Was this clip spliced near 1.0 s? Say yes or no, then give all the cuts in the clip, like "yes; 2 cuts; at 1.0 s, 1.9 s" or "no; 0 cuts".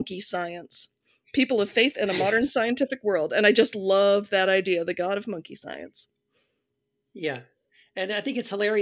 no; 0 cuts